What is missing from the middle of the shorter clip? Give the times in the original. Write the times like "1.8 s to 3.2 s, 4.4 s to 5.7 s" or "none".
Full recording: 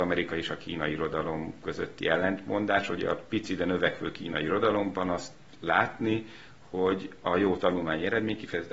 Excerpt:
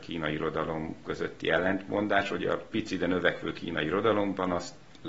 none